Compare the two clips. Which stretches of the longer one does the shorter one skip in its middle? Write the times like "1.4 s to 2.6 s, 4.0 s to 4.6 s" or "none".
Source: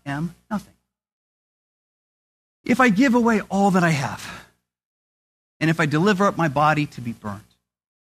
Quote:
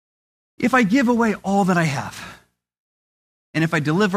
none